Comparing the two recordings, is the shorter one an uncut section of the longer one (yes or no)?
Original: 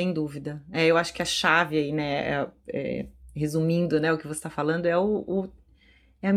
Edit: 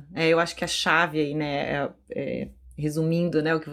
yes